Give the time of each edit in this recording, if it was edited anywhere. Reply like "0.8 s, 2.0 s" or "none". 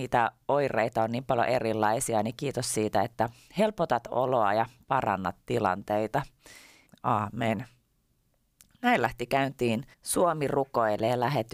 6.9 s, 9.9 s